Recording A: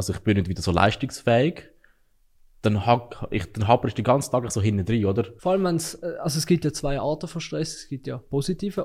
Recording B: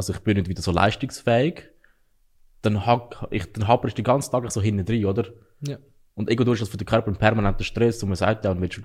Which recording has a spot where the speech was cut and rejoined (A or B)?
A